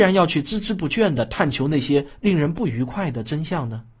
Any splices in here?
no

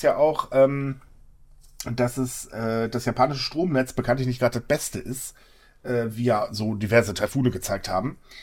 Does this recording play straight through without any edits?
yes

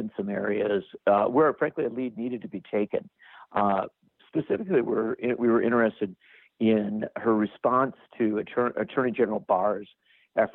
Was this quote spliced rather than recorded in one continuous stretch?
no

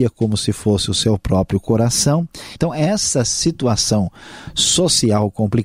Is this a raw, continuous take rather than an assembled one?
no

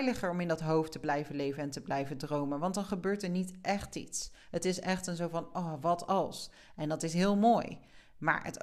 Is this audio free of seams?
yes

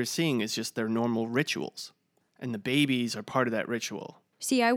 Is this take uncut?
no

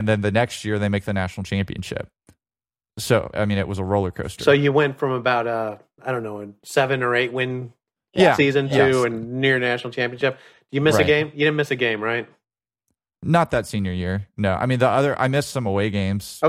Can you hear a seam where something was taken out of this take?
yes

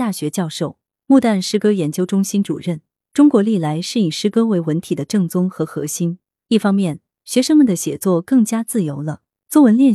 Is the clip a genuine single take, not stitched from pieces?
no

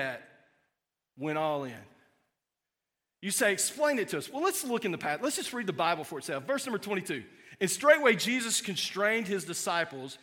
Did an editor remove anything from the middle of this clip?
no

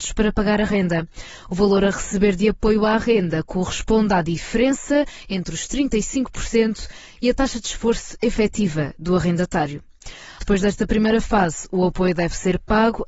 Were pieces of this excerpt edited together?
yes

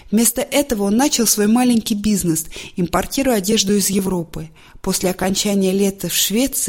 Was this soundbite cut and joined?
no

